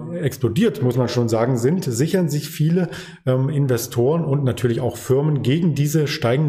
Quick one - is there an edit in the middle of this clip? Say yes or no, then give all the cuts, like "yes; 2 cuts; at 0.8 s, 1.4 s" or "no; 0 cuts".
no; 0 cuts